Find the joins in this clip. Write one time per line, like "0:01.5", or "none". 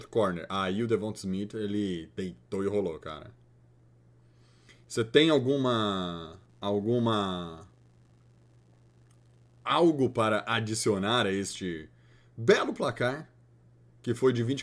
none